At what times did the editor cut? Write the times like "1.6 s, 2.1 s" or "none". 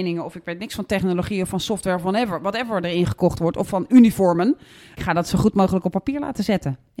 none